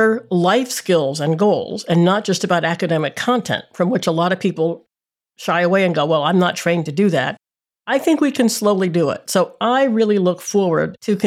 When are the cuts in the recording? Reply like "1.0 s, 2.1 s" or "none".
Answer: none